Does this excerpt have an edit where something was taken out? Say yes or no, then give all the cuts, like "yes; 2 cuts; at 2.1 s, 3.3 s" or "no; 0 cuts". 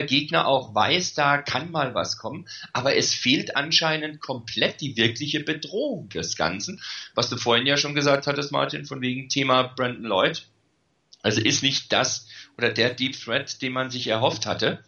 no; 0 cuts